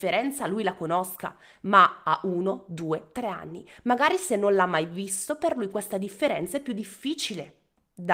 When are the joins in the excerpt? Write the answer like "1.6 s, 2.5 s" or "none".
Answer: none